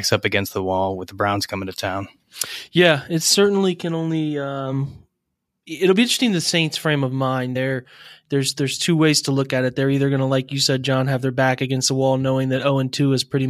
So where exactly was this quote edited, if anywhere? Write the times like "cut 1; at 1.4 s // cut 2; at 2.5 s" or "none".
none

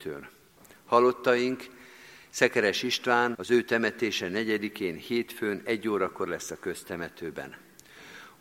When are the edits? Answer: cut 1; at 3.3 s

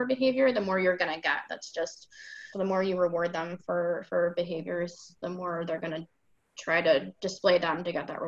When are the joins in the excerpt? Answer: cut 1; at 2.5 s

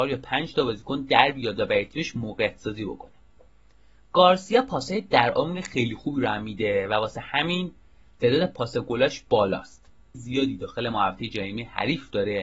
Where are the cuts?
cut 1; at 10.1 s

